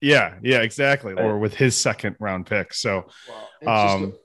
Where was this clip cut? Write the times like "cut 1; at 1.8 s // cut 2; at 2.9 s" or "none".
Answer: cut 1; at 1.2 s